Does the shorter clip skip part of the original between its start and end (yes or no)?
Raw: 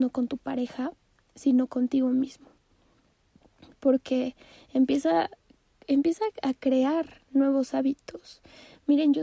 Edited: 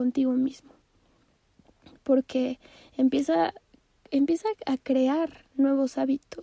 no